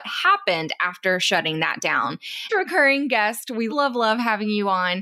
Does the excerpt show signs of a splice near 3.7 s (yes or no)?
yes